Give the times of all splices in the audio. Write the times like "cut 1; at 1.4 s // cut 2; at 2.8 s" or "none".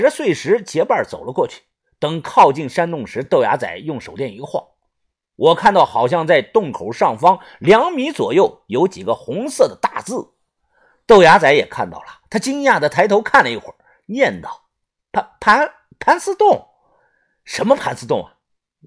none